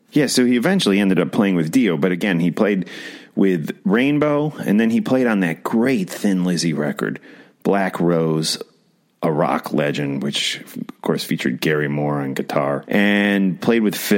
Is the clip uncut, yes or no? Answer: no